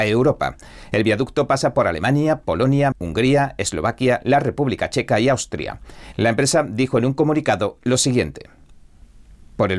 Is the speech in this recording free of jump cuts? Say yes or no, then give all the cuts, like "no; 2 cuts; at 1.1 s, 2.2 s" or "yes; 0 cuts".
no; 2 cuts; at 2.9 s, 6.1 s